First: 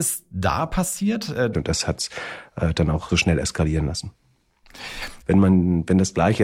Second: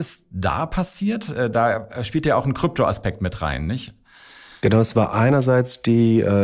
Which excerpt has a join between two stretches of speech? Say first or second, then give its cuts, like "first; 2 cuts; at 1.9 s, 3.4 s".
first; 3 cuts; at 1.5 s, 3.1 s, 5.2 s